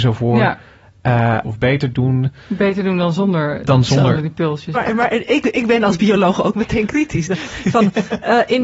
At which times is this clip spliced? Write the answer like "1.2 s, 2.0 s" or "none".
1.4 s, 4.7 s